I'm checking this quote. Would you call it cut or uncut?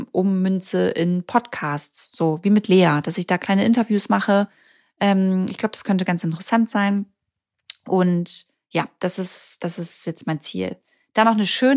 uncut